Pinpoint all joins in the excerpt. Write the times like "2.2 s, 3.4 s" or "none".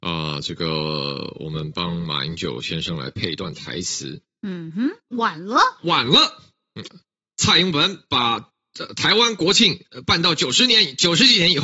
5.1 s